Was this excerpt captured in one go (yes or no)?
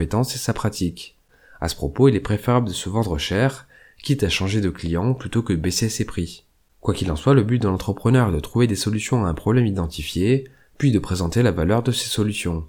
yes